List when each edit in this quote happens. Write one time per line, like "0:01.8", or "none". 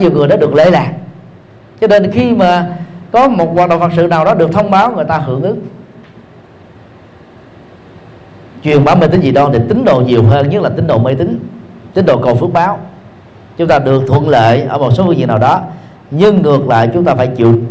none